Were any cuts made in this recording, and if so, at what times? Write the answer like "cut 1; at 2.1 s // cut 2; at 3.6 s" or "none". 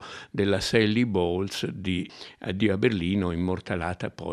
none

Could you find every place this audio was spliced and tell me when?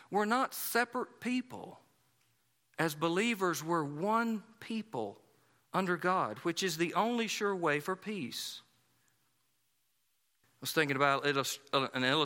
cut 1; at 10.4 s

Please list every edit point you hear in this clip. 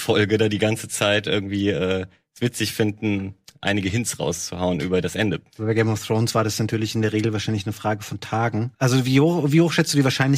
cut 1; at 8.7 s

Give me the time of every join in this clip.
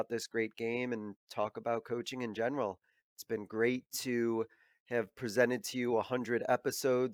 cut 1; at 3.0 s

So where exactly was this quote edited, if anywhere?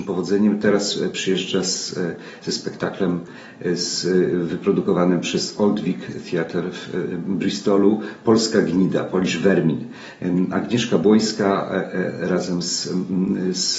none

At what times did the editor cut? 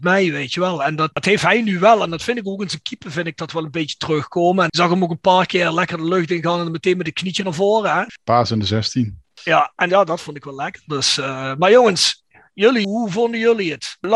cut 1; at 9.9 s

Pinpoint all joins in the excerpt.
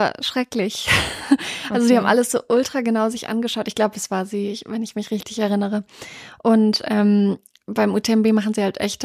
none

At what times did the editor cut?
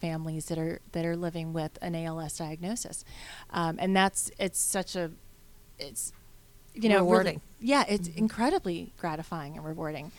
cut 1; at 5.7 s

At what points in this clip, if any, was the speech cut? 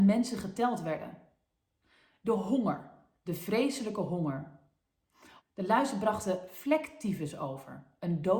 cut 1; at 5.4 s

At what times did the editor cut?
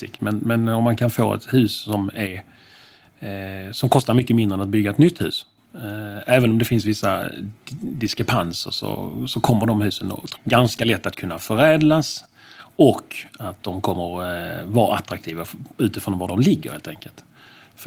cut 1; at 10.4 s

